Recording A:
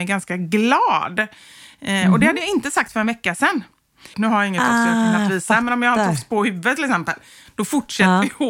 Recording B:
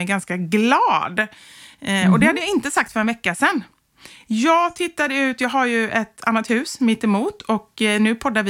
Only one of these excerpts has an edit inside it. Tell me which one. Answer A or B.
A